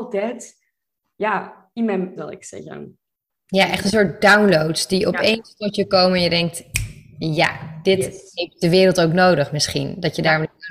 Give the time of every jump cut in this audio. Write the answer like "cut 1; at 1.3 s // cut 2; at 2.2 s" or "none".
cut 1; at 2.2 s

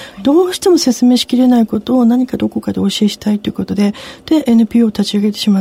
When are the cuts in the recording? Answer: none

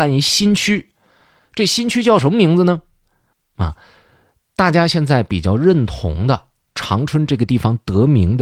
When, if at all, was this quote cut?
cut 1; at 3.3 s

